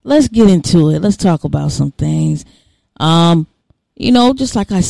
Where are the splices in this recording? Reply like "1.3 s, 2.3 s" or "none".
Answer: none